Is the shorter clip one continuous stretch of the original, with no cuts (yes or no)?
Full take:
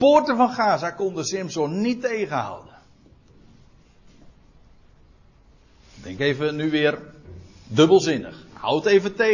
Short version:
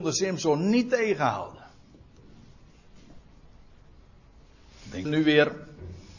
no